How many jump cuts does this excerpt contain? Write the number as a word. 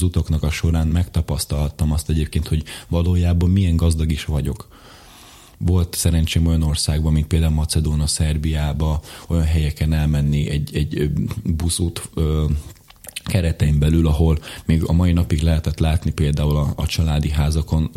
zero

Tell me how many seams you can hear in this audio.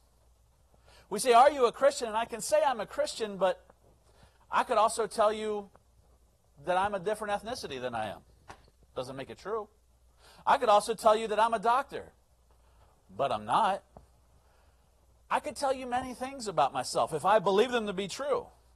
zero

